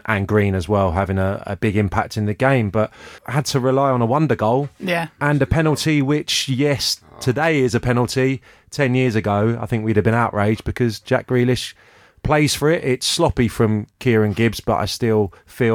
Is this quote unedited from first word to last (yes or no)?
no